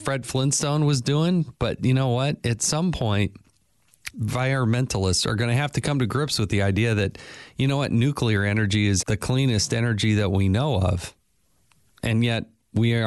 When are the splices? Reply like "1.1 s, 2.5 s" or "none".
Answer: 4.1 s, 9.0 s